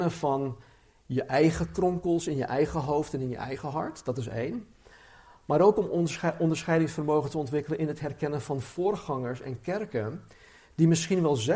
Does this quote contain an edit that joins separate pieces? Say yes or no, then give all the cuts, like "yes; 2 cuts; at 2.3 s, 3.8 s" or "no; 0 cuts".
no; 0 cuts